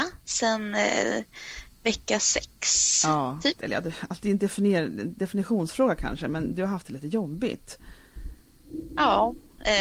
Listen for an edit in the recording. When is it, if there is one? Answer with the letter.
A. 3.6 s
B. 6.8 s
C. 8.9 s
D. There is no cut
A